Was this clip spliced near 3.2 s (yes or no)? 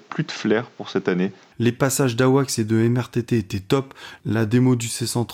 no